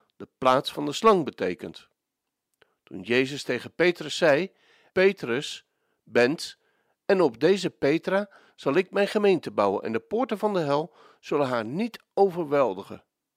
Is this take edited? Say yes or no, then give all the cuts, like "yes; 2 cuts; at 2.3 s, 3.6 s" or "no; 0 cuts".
yes; 1 cut; at 4.9 s